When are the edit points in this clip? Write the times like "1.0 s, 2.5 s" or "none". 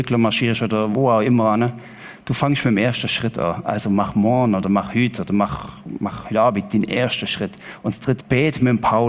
8.2 s